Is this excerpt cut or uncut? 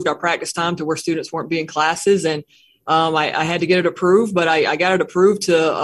uncut